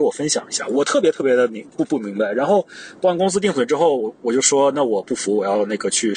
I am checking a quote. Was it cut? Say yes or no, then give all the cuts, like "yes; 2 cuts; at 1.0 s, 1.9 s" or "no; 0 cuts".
no; 0 cuts